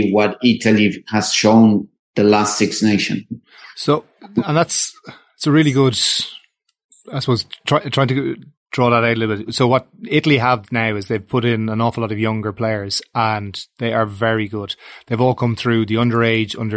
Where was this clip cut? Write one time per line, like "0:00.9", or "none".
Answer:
0:09.5